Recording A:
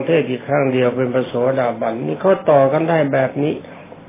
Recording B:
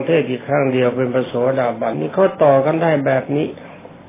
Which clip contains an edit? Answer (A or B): B